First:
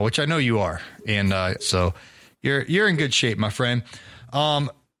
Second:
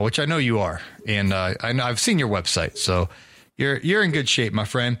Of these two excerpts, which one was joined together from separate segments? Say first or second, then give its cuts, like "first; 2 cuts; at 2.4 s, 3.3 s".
first; 1 cut; at 1.6 s